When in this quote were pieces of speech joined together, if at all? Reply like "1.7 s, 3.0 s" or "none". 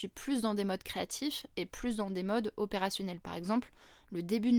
none